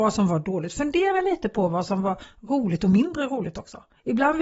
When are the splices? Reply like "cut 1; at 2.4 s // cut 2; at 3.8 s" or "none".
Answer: none